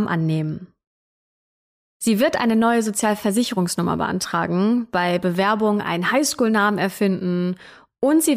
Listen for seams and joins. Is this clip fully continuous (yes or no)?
yes